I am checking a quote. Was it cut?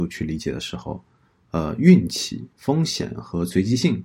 yes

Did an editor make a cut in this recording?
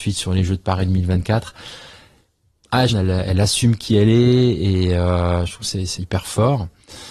yes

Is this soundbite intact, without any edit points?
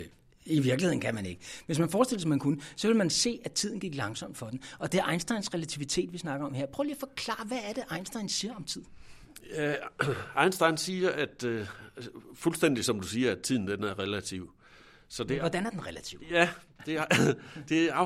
yes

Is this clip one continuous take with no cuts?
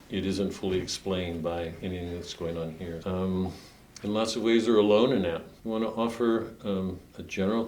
no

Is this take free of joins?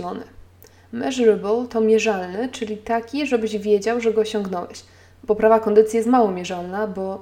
yes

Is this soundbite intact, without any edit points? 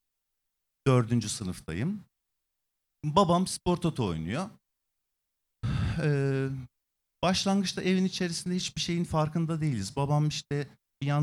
yes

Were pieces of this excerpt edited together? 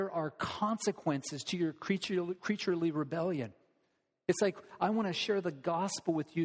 no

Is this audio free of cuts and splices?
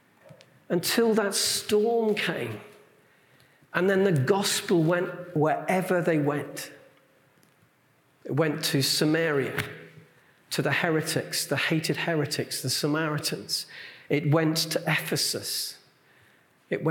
yes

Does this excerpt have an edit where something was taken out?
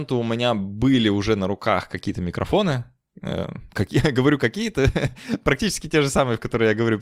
no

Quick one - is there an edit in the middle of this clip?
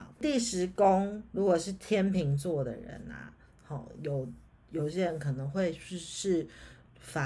no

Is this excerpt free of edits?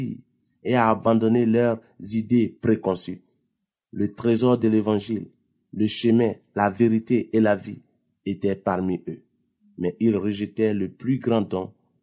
yes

